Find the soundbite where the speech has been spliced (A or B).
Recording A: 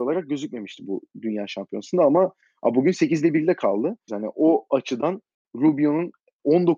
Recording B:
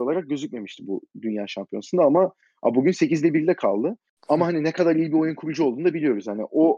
A